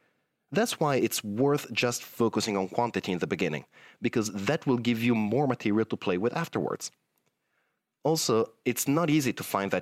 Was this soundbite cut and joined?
no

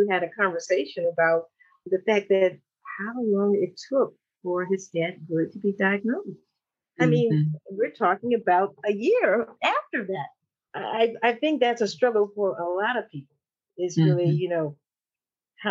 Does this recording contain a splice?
no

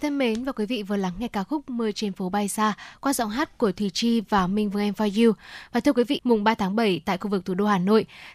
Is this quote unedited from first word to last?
no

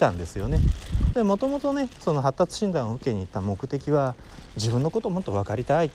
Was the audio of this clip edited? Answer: yes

